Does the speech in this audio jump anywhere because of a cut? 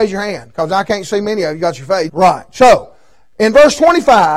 yes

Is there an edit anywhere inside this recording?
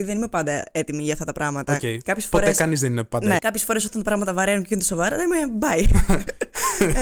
yes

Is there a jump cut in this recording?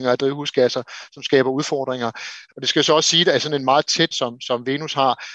yes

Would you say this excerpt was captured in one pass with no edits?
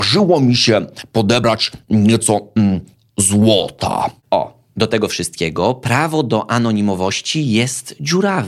no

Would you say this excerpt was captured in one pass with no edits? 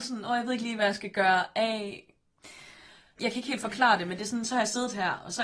no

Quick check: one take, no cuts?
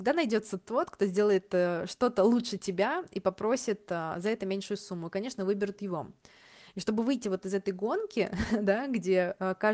yes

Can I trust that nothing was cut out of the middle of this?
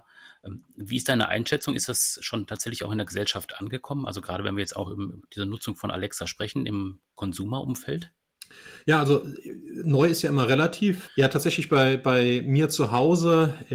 no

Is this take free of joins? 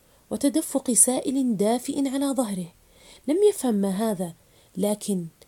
yes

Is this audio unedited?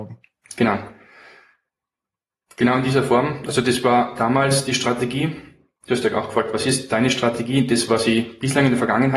yes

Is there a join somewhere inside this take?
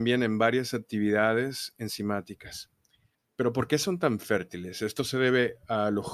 yes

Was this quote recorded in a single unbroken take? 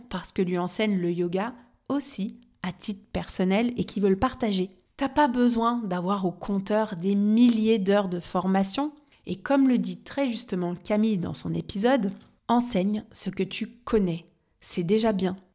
yes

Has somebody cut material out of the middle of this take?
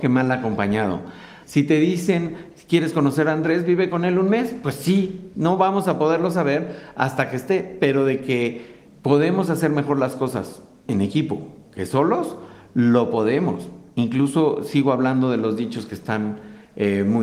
yes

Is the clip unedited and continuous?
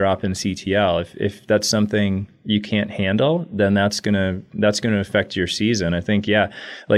yes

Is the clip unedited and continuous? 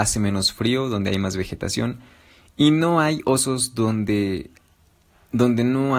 yes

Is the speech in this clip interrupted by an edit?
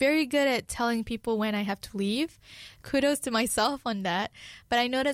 no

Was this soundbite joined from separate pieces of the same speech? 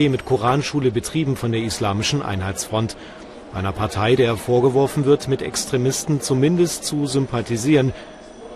no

